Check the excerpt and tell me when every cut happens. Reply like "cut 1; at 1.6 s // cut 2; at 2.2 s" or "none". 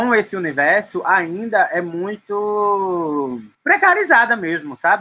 cut 1; at 3.5 s